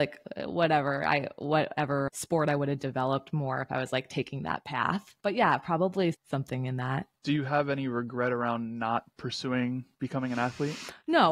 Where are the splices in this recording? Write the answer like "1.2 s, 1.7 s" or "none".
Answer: 6.1 s, 9.9 s